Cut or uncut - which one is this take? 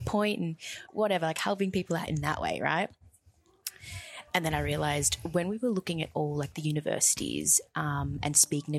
uncut